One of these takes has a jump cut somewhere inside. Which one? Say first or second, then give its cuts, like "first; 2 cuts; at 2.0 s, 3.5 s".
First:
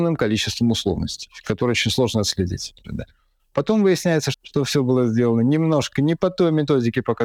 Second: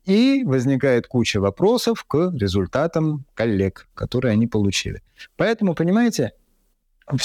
first; 2 cuts; at 2.8 s, 4.3 s